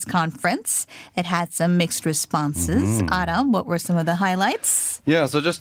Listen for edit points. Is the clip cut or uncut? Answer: uncut